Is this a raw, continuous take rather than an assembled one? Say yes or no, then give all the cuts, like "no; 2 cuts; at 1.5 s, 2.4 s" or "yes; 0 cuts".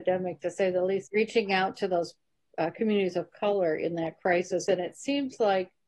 no; 2 cuts; at 1.1 s, 4.7 s